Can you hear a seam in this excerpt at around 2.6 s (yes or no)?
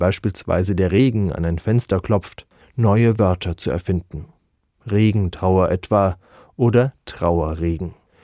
yes